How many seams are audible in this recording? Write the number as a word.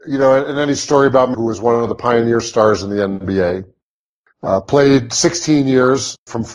one